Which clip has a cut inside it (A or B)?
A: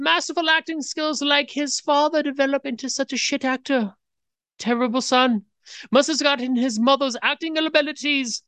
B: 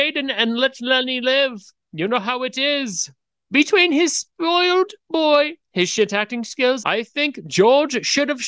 B